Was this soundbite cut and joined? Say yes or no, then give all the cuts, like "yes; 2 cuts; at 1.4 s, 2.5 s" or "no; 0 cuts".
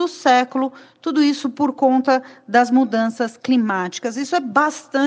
no; 0 cuts